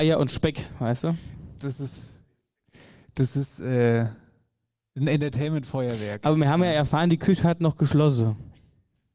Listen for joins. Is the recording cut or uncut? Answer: uncut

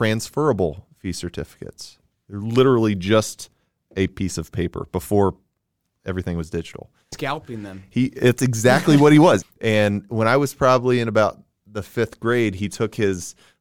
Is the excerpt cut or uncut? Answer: cut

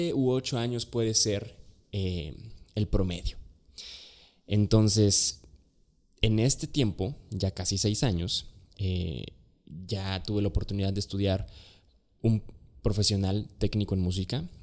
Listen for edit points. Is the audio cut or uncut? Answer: uncut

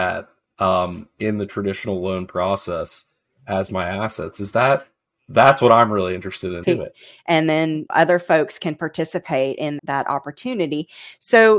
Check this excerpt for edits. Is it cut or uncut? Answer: cut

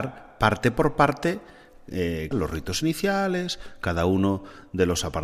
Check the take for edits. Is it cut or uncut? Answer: cut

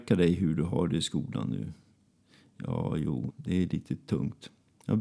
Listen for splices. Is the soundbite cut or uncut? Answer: cut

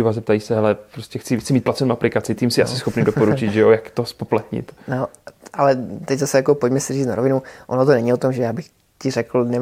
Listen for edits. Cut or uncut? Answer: uncut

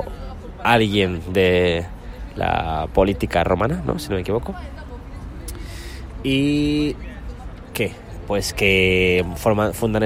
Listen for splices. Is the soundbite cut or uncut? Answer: uncut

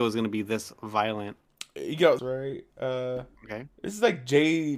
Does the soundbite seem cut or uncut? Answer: cut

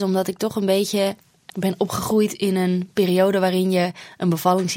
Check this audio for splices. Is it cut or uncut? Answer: cut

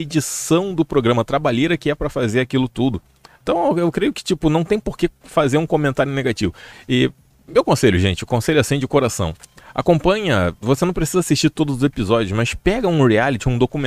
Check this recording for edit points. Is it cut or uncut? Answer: cut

